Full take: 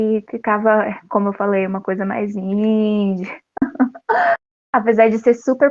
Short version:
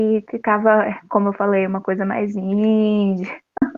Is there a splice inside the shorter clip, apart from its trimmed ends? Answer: no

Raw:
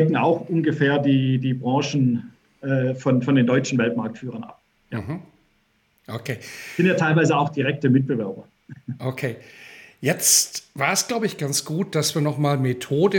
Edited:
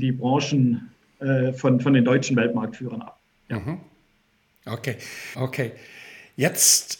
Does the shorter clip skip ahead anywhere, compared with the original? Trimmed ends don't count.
yes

